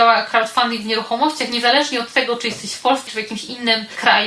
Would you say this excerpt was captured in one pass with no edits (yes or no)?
no